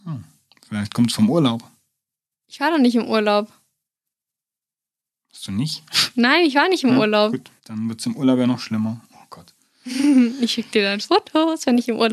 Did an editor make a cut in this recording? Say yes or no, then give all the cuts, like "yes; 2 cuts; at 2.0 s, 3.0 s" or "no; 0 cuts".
yes; 1 cut; at 7.6 s